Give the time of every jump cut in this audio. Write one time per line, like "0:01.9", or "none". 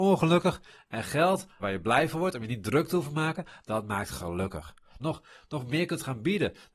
0:01.6
0:05.0